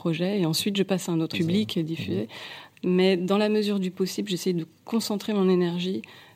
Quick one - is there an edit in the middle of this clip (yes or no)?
yes